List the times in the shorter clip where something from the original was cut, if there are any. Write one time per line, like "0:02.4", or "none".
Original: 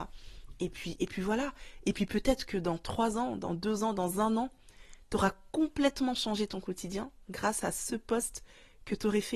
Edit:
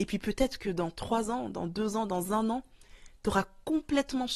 none